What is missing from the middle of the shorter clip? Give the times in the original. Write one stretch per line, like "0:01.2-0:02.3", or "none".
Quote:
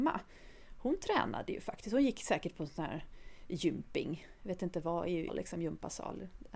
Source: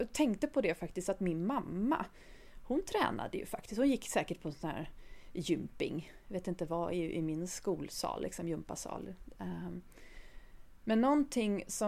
0:07.1-0:08.1